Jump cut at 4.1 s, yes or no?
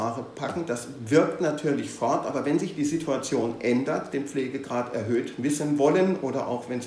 yes